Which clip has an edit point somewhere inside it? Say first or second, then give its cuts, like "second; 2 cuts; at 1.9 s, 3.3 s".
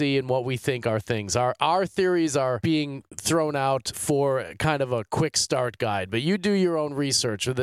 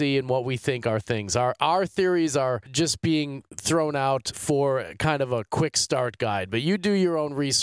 first; 1 cut; at 2.6 s